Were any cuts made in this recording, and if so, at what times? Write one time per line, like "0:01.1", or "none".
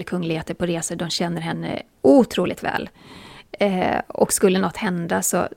none